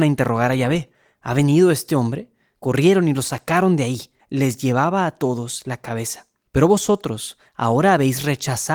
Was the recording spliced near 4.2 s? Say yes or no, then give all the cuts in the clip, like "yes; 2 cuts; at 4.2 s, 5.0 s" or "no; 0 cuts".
yes; 3 cuts; at 2.5 s, 4.2 s, 6.5 s